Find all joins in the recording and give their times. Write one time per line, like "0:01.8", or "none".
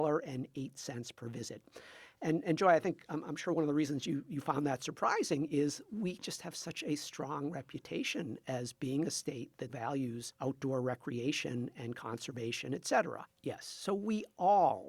0:09.7
0:13.3